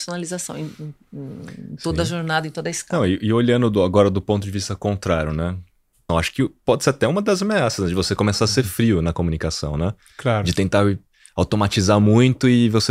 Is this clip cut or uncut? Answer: cut